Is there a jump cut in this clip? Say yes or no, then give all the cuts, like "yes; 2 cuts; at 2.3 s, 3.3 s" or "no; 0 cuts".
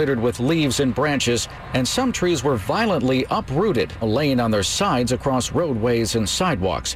yes; 1 cut; at 4.0 s